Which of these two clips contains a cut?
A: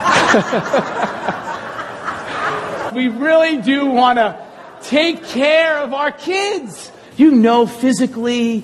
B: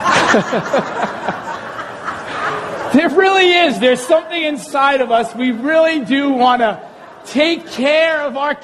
A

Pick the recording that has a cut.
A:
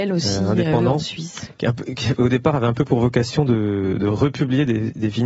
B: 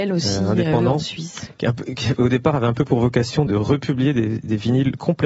B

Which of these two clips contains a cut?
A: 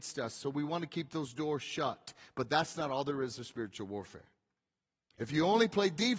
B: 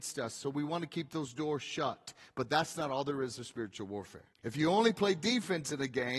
B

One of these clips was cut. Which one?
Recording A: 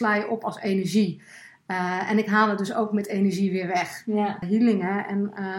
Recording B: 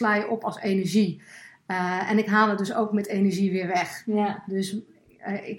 A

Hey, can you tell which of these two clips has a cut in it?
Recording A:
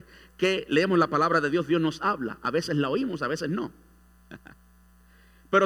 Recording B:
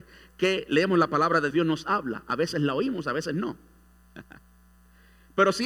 B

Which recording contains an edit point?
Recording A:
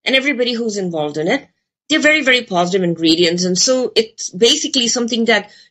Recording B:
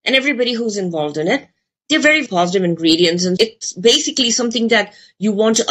B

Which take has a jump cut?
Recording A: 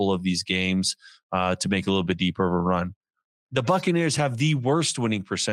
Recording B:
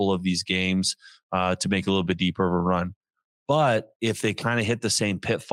A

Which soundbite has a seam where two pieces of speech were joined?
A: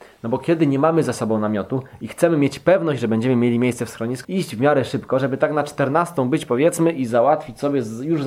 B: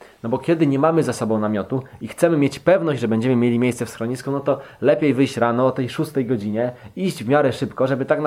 A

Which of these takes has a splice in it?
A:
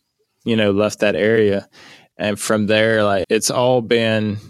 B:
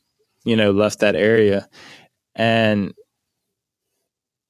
A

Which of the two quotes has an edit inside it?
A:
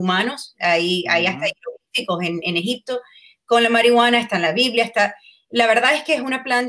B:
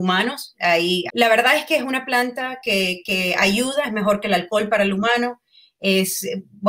B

